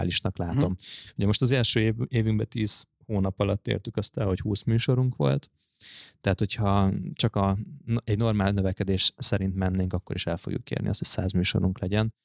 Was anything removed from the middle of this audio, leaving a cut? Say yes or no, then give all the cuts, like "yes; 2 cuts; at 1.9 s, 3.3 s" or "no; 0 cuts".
no; 0 cuts